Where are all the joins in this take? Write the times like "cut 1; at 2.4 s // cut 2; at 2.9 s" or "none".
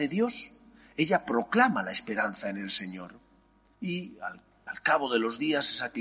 cut 1; at 3.7 s